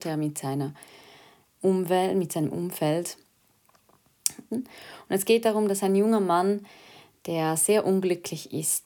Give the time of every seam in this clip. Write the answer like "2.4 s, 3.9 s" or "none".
4.5 s